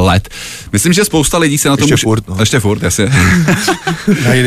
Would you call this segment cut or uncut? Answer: uncut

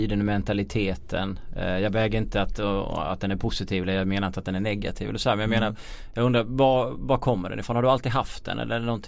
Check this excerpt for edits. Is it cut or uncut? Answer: uncut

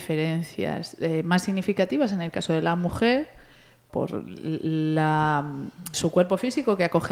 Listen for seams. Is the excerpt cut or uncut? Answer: cut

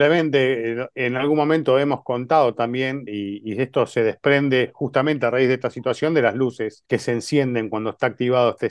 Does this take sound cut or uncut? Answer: cut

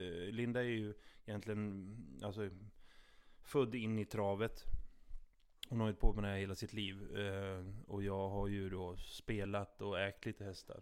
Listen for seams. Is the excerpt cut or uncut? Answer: uncut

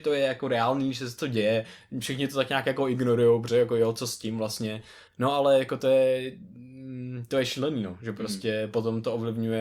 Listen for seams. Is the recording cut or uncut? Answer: cut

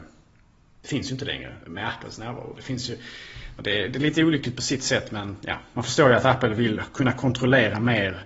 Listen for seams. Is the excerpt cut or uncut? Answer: cut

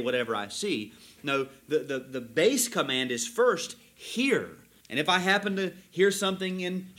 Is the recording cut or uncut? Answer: cut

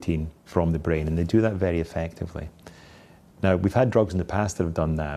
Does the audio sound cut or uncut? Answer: uncut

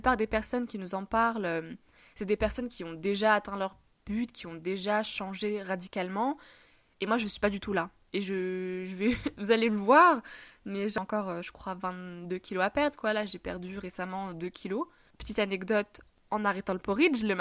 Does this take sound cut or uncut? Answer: uncut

